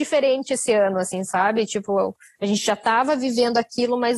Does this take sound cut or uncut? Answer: uncut